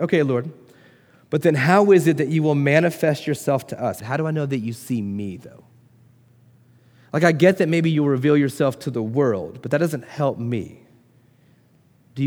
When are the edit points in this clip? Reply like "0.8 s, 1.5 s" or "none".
4.0 s